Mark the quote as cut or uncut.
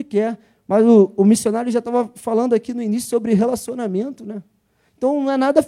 uncut